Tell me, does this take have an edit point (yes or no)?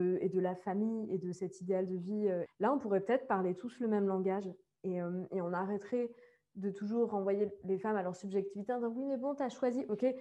yes